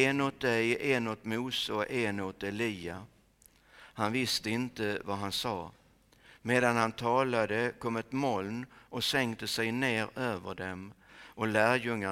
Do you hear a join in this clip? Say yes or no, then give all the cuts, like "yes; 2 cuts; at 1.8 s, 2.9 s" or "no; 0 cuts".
no; 0 cuts